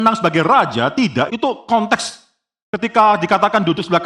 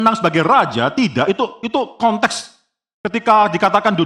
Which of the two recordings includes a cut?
first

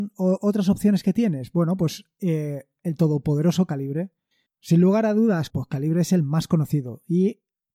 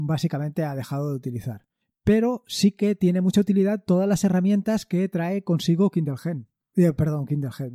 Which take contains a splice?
first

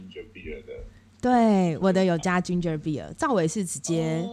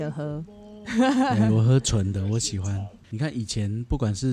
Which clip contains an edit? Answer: first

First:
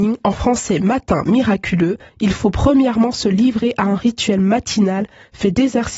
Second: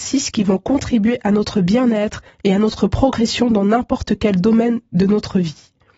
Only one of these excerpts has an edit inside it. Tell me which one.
first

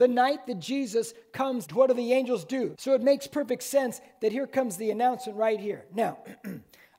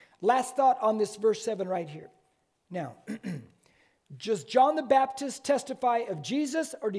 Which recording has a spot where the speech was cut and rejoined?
first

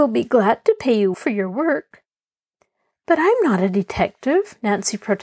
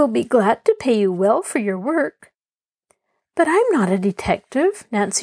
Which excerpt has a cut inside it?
first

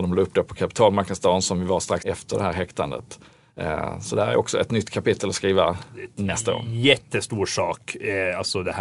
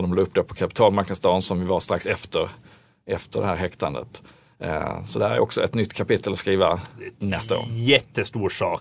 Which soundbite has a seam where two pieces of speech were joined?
first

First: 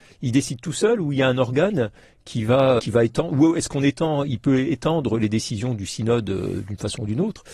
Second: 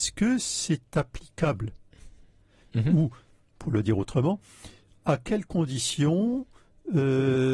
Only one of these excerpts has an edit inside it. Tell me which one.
first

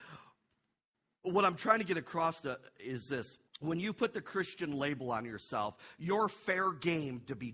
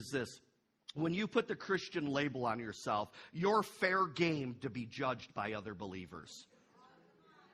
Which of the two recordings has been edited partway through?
first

